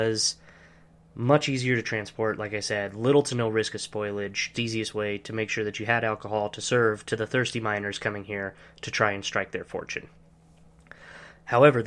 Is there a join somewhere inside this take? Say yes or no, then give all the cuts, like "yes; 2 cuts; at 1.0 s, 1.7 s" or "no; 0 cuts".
yes; 1 cut; at 4.5 s